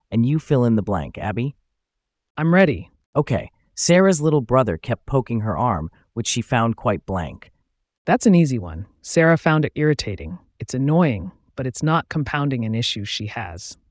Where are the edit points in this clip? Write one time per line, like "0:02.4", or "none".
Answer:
0:03.0
0:09.7